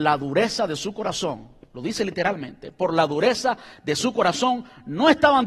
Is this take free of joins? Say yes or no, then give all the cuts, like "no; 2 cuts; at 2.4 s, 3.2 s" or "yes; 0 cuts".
yes; 0 cuts